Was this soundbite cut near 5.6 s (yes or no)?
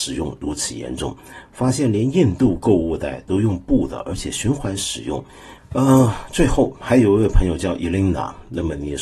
yes